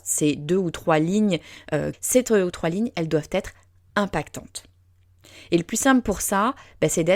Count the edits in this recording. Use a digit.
1